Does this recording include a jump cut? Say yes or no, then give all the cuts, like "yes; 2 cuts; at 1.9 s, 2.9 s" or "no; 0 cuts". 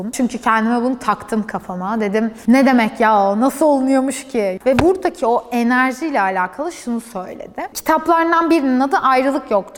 yes; 1 cut; at 4.6 s